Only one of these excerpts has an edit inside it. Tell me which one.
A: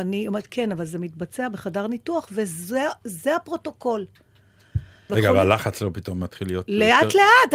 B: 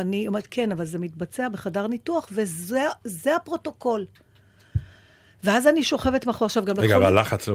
A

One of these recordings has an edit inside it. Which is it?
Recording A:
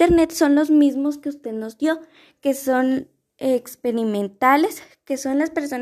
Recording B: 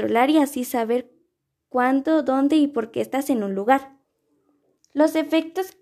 B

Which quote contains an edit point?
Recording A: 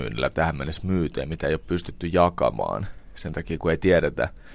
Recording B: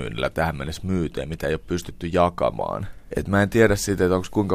B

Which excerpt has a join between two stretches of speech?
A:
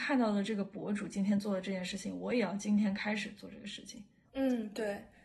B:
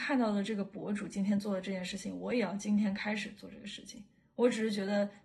A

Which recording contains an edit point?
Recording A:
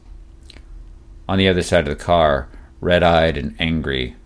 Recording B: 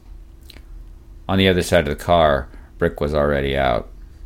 B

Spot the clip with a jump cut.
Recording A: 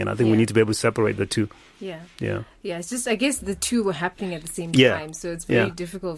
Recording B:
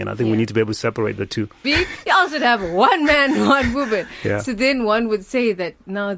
B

